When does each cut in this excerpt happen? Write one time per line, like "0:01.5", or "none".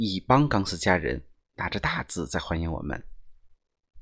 none

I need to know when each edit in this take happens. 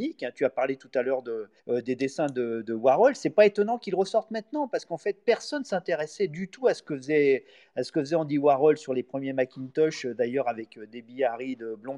0:01.6

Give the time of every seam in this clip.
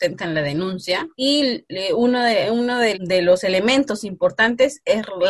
0:01.1
0:02.9

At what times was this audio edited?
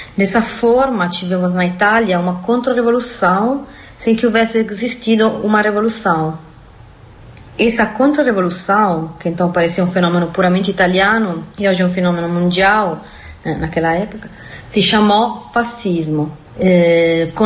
0:16.4

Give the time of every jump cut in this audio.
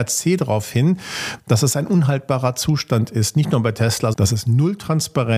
0:04.1

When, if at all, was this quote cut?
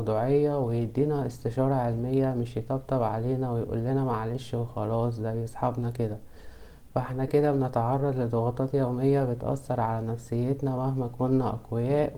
0:07.3

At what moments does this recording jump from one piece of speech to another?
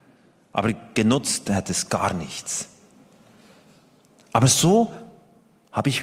none

